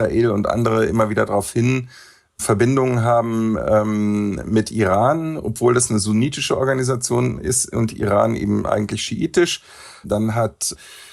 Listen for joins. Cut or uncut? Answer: cut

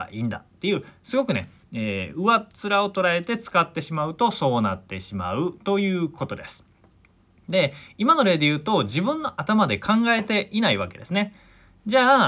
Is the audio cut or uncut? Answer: uncut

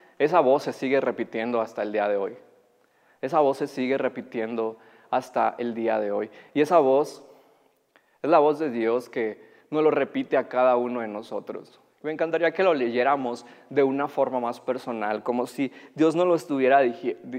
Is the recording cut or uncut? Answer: uncut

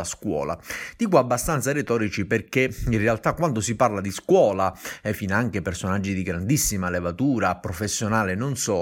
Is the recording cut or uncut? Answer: uncut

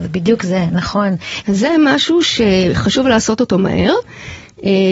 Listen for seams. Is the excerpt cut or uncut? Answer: cut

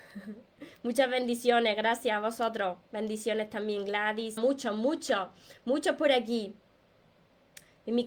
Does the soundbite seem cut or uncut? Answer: cut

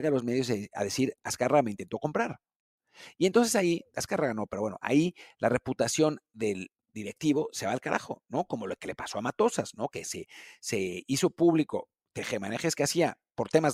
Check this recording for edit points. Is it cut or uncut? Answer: uncut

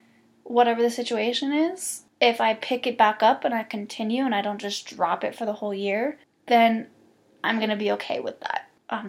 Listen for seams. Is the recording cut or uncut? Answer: uncut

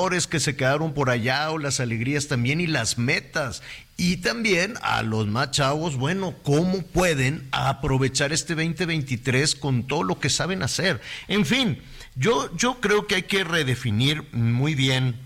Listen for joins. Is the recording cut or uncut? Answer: uncut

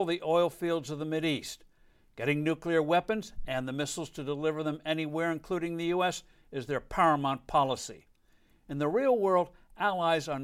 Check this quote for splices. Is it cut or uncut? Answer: uncut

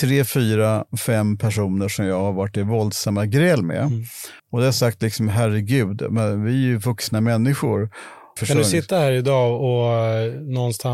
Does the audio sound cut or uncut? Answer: cut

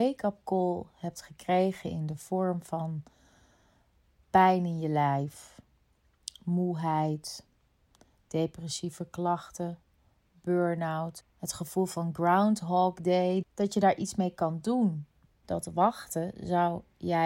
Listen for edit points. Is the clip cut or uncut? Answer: cut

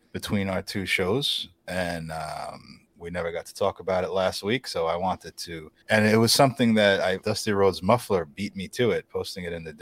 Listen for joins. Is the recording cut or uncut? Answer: cut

